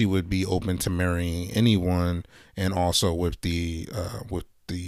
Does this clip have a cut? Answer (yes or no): no